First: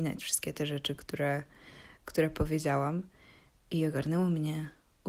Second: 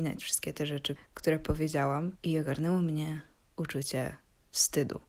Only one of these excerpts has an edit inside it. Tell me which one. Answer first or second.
second